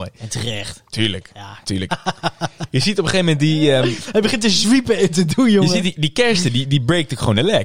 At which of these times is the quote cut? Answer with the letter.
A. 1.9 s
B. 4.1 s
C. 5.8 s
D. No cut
A